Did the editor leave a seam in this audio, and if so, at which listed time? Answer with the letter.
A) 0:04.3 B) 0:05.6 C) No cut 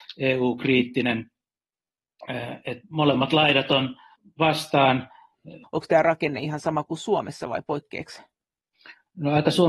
B